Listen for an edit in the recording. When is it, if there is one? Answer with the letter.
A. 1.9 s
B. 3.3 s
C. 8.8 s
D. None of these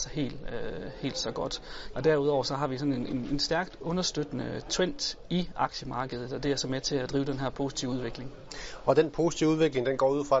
A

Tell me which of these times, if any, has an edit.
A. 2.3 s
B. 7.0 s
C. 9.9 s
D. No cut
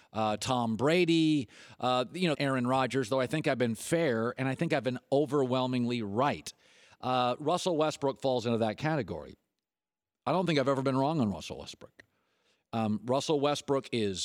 A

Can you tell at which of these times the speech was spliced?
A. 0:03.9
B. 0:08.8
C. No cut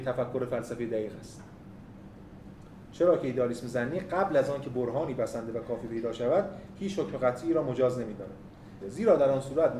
B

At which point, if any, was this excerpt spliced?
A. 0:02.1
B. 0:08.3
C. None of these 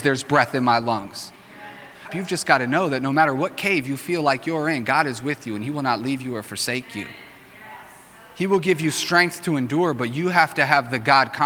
A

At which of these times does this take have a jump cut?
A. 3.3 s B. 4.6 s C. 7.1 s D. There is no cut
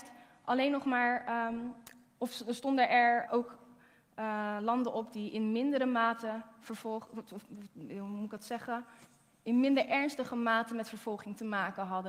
A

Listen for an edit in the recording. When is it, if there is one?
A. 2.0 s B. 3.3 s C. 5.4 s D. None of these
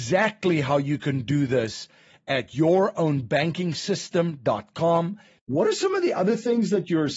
C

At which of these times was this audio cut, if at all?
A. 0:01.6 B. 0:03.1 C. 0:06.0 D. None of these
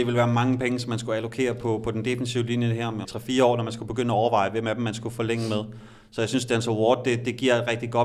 B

